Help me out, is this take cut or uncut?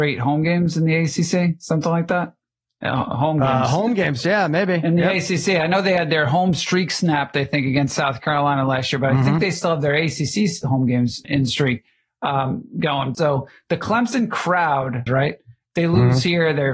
cut